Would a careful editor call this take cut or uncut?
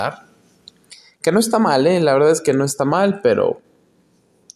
uncut